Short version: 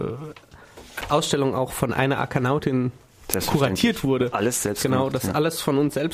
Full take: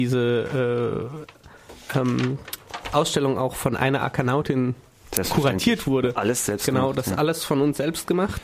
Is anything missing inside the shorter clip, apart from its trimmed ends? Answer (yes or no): yes